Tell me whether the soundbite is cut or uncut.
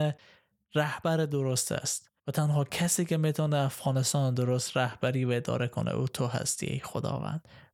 cut